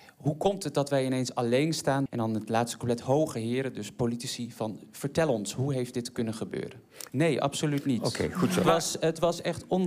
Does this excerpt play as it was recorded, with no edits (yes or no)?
no